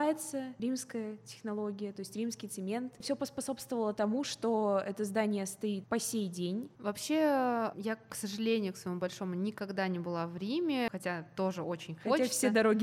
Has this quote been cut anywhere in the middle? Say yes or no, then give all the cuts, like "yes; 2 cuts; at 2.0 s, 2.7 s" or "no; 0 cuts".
yes; 1 cut; at 6.7 s